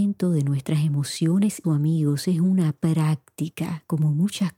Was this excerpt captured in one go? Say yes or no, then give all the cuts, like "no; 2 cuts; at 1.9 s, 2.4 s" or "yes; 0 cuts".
no; 1 cut; at 1.6 s